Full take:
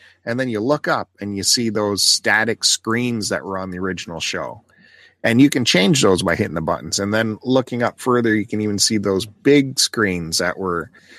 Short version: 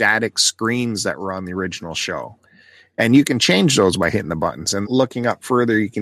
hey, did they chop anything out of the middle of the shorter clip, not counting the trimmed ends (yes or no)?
yes